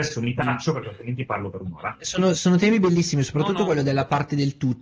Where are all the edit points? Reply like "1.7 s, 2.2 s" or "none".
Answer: none